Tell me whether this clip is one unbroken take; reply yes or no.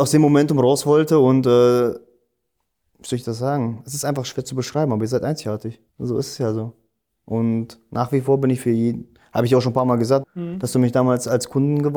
no